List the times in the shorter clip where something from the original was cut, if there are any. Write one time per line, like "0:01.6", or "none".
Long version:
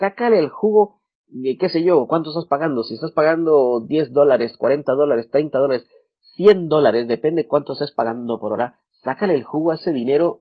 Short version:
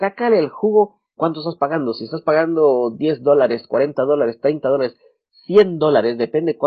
0:01.2